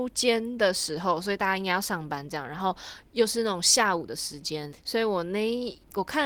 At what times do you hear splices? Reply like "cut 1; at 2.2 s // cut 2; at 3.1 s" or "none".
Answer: cut 1; at 4.7 s